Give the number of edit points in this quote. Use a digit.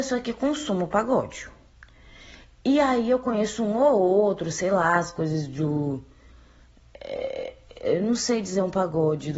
0